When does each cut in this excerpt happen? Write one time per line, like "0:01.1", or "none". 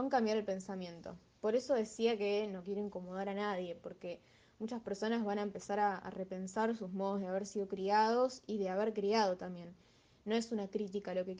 none